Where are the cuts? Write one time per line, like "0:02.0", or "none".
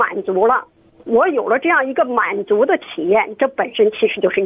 none